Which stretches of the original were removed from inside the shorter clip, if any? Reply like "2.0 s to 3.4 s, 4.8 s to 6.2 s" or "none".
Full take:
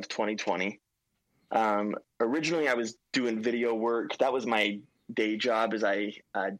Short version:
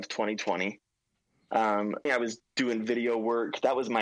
2.1 s to 2.6 s